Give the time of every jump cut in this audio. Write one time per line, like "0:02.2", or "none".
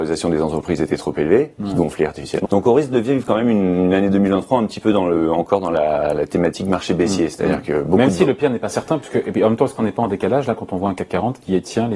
0:02.4